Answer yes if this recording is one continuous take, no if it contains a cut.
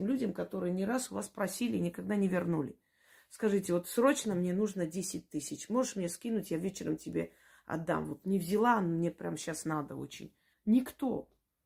no